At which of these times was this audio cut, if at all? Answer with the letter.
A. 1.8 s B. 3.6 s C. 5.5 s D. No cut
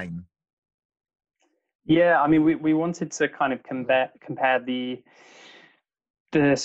D